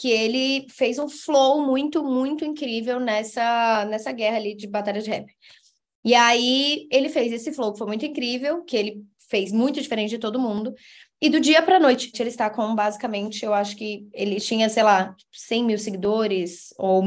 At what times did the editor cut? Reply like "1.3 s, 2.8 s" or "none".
12.1 s